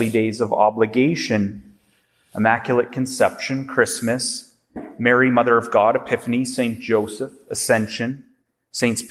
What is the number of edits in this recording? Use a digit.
0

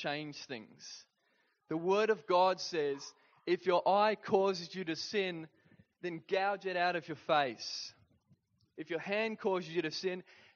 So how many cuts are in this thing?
1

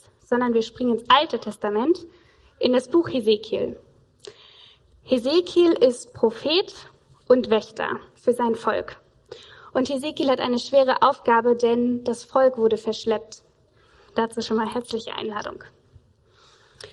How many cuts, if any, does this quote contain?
1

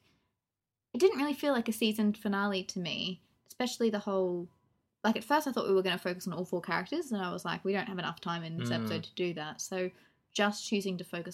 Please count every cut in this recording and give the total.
0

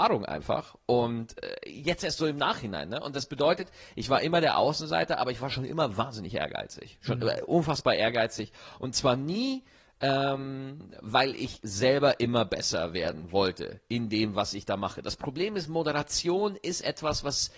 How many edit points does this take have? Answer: 0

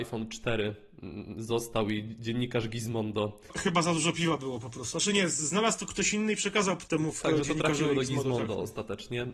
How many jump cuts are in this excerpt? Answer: 1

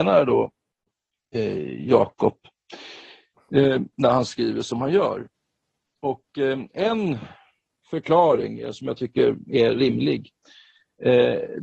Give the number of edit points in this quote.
0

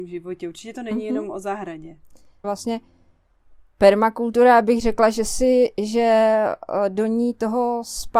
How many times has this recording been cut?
1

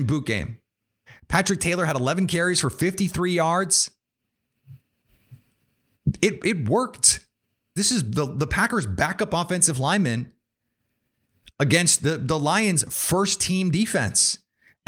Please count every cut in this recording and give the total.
2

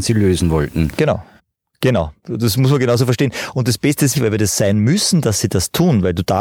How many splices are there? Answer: 3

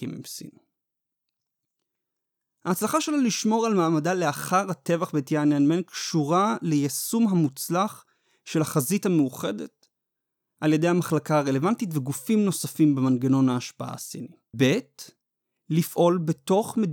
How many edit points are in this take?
1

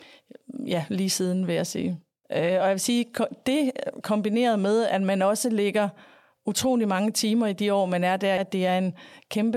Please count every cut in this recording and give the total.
2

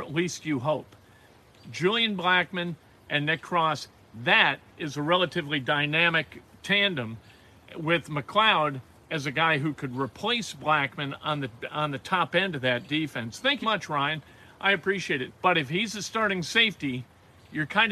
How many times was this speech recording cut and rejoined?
2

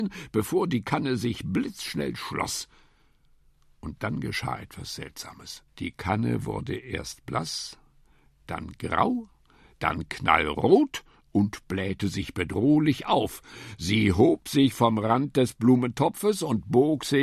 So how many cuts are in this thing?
1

